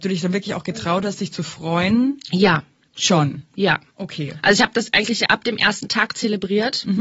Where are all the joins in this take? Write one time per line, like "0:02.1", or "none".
none